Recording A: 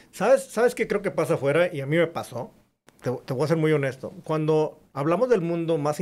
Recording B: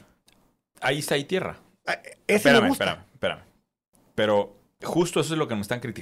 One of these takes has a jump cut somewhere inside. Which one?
B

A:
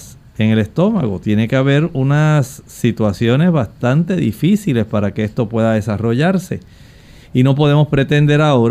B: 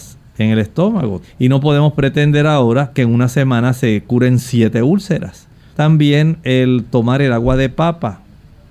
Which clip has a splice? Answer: B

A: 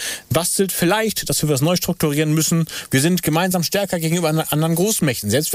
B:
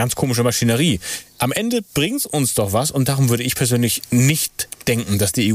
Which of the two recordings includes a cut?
A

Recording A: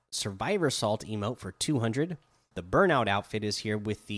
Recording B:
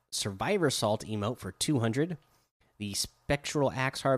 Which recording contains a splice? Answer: A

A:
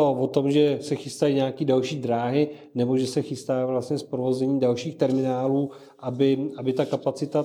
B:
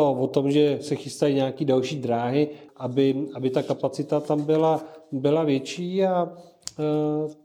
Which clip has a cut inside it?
B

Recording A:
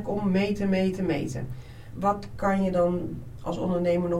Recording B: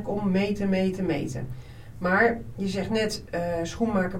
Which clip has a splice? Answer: A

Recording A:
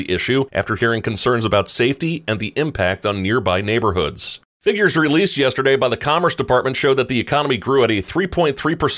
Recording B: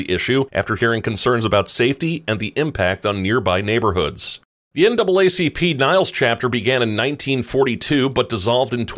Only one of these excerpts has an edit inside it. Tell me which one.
A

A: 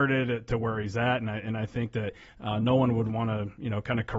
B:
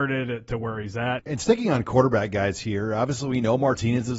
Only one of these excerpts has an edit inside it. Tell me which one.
B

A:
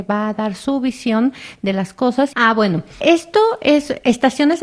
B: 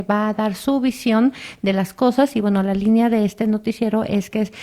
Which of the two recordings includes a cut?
A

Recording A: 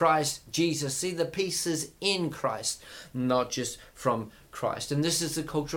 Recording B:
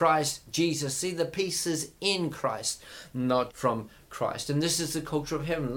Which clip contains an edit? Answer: B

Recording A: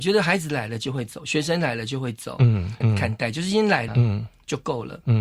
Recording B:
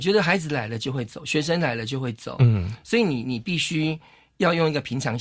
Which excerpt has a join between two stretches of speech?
A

